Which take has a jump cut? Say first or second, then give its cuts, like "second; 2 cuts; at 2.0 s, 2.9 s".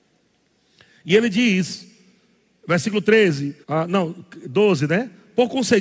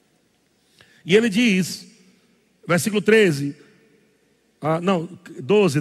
first; 1 cut; at 3.6 s